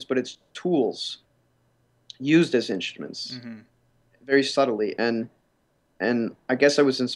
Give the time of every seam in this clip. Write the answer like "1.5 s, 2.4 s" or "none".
none

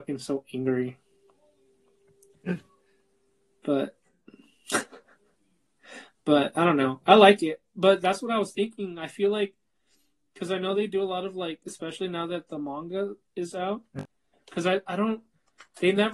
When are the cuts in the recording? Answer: 14.3 s

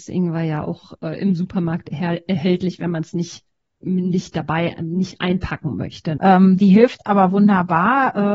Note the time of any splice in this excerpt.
6.2 s

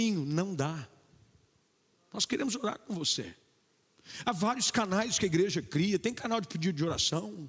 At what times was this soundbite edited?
none

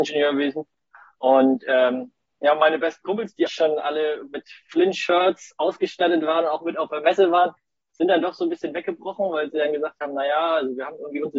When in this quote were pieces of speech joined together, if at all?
1.2 s, 3.5 s

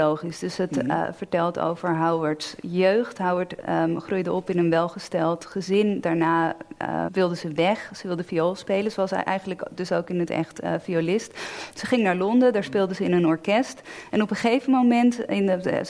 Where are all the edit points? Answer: 7.1 s

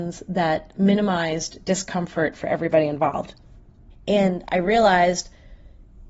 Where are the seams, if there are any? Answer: 3.9 s

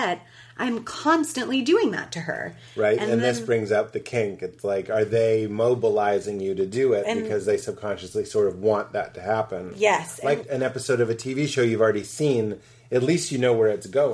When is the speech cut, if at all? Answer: 10.4 s

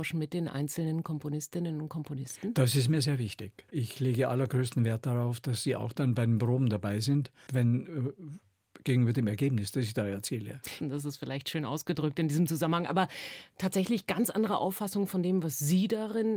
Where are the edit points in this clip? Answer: 3.7 s, 7.5 s, 10.8 s

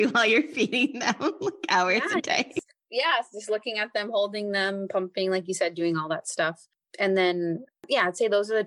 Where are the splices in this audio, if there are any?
none

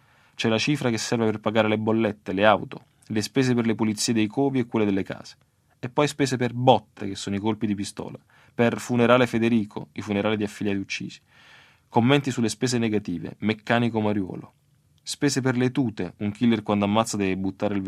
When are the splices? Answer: none

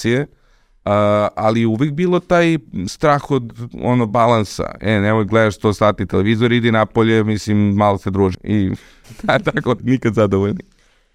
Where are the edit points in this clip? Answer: 8.3 s, 9.8 s

